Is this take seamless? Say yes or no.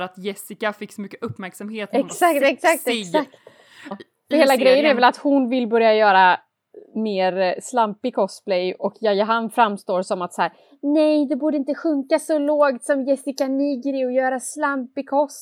no